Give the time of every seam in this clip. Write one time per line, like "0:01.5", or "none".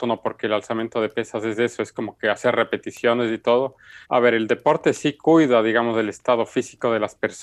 0:04.0